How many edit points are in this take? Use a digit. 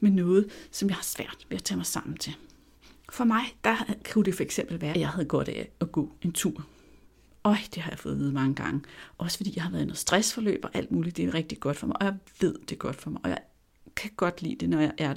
1